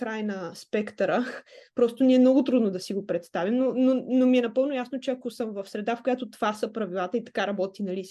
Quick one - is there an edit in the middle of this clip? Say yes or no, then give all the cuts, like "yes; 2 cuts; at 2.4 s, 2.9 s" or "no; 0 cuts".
no; 0 cuts